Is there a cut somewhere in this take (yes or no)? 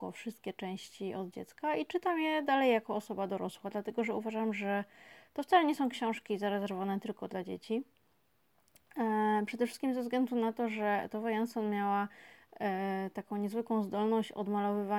no